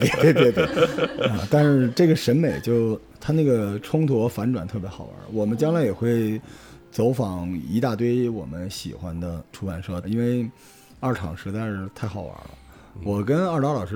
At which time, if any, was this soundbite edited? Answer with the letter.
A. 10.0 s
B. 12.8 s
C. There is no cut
A